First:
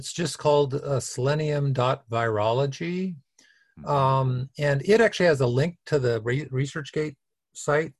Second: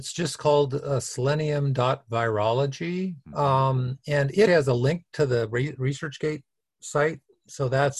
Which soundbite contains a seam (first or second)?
second